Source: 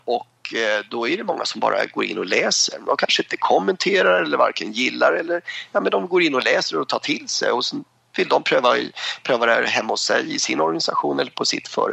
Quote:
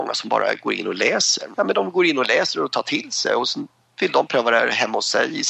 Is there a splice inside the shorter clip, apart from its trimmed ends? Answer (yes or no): yes